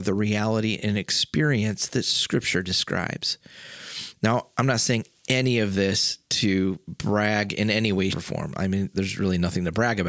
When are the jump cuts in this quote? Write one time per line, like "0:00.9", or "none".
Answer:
0:08.1